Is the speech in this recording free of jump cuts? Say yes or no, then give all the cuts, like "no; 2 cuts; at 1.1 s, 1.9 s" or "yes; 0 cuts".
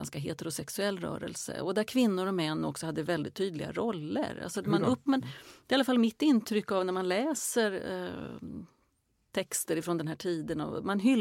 no; 1 cut; at 5.1 s